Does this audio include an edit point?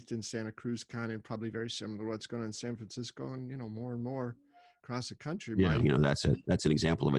yes; 1 cut; at 5.8 s

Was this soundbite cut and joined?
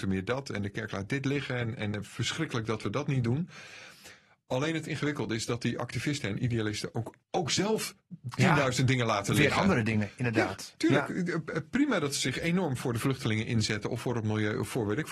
yes; 1 cut; at 7.2 s

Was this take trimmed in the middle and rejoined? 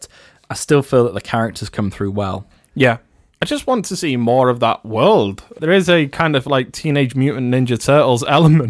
yes; 1 cut; at 5.6 s

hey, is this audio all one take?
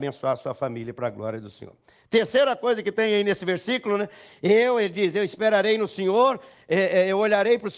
yes; 0 cuts

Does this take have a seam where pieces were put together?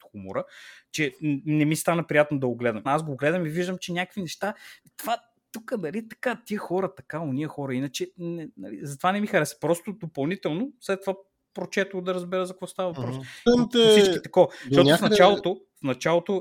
yes; 2 cuts; at 2.9 s, 13.5 s

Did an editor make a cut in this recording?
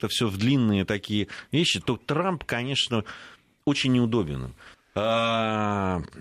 yes; 1 cut; at 4.7 s

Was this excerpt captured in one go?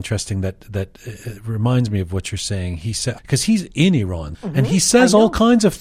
no; 2 cuts; at 3.2 s, 4.3 s

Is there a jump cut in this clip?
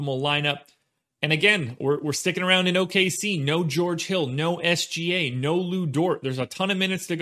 no; 0 cuts

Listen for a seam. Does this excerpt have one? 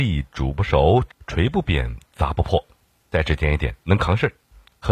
yes; 1 cut; at 1.1 s

